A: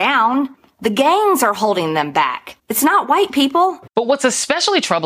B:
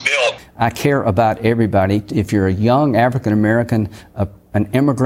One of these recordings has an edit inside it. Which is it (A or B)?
A